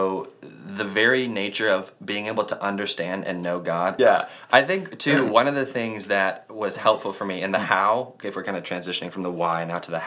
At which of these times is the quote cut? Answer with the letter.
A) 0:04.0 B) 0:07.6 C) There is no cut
A